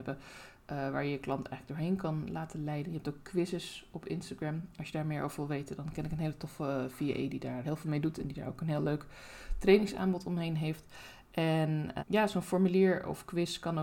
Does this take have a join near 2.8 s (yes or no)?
no